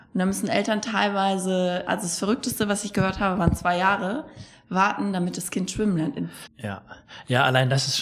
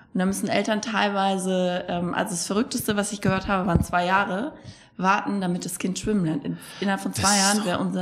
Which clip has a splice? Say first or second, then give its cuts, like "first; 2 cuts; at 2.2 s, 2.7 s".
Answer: first; 2 cuts; at 1.9 s, 6.5 s